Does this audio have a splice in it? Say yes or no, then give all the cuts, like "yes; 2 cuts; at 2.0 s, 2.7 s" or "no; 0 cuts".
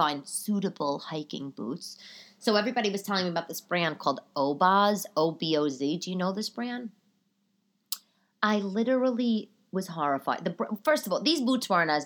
no; 0 cuts